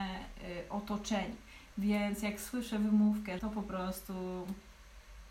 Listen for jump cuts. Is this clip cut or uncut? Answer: cut